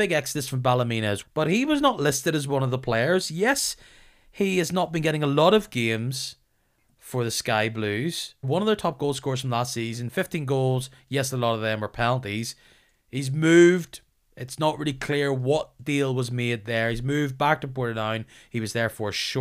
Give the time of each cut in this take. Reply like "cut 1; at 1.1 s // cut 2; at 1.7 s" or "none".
cut 1; at 1.2 s // cut 2; at 8.4 s

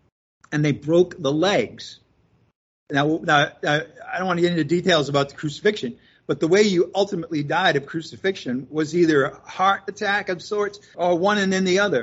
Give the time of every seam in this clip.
cut 1; at 10.9 s

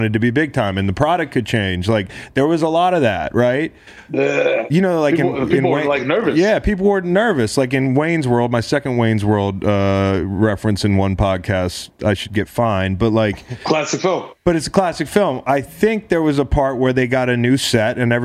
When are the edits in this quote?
none

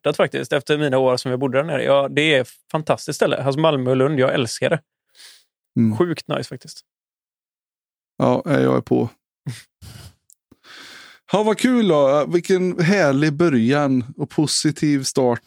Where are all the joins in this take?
none

